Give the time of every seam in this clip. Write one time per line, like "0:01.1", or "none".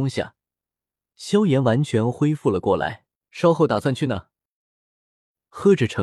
0:03.2

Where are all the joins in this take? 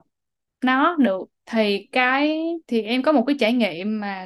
0:01.3
0:02.6

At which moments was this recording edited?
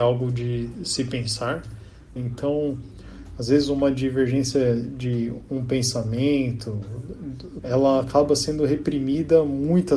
0:02.2
0:07.6

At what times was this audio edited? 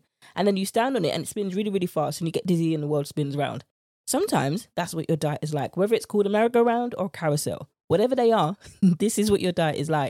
none

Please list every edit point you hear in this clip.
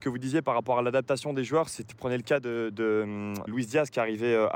0:01.9
0:03.5

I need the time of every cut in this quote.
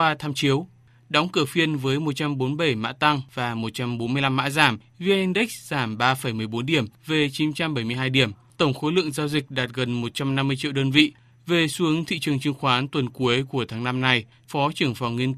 0:14.5

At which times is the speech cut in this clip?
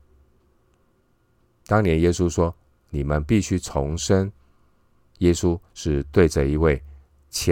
none

